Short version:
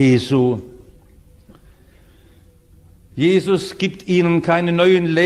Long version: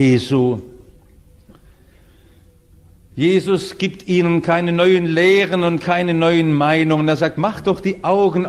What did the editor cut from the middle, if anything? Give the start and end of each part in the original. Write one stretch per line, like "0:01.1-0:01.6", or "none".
none